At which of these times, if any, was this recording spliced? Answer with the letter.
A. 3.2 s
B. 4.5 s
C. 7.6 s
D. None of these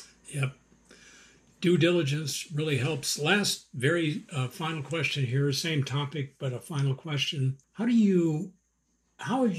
C